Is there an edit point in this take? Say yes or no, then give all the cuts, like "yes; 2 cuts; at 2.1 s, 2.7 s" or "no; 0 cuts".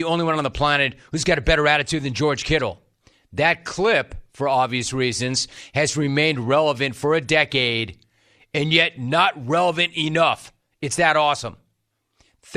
no; 0 cuts